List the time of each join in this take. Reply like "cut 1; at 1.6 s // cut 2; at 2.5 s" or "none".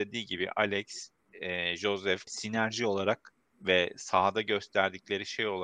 cut 1; at 2.3 s